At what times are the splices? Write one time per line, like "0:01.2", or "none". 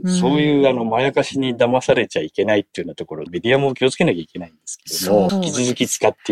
0:03.3
0:05.3